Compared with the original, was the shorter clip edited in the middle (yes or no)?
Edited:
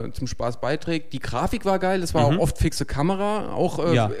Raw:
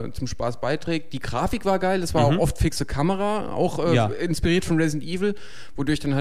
no